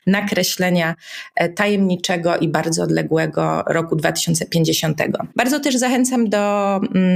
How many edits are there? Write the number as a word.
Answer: zero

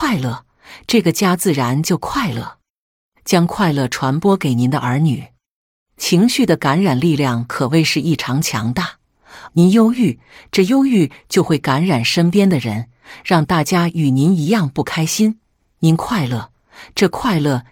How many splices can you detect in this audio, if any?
one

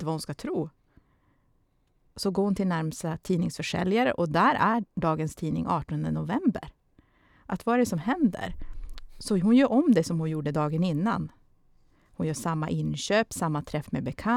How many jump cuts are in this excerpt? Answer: zero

